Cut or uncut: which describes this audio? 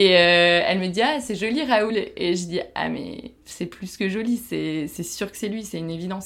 uncut